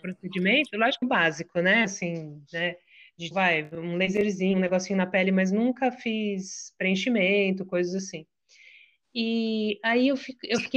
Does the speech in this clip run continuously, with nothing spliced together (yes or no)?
no